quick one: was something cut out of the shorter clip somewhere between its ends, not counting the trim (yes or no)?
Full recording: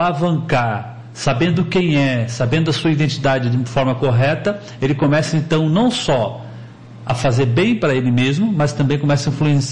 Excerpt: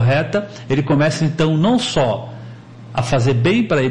no